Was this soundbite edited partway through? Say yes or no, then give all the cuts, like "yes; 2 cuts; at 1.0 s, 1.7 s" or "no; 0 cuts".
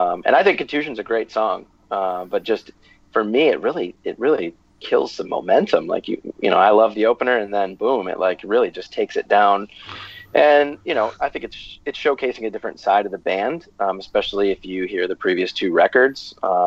no; 0 cuts